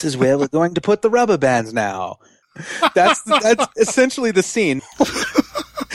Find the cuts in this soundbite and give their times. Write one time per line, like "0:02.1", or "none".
0:02.4
0:04.8